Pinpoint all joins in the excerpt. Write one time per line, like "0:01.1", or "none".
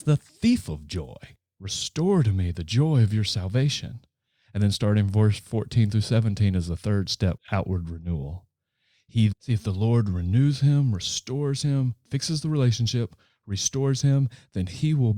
0:07.4
0:09.3